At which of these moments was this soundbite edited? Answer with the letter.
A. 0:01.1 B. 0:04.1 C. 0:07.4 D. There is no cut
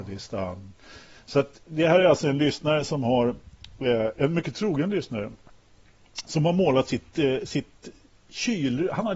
D